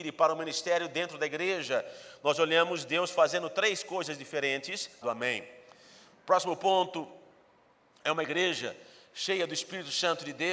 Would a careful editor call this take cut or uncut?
cut